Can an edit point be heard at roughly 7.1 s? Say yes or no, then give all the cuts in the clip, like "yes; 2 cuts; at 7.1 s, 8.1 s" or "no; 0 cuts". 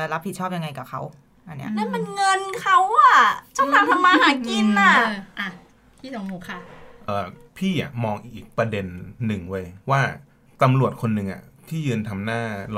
yes; 2 cuts; at 7.1 s, 9.8 s